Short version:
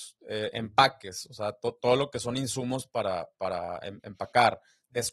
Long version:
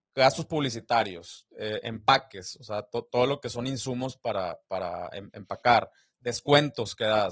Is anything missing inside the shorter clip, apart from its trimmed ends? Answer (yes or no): no